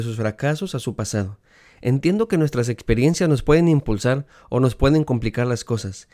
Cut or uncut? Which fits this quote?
uncut